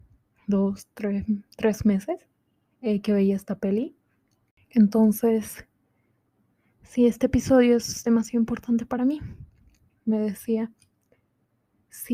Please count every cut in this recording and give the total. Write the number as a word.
two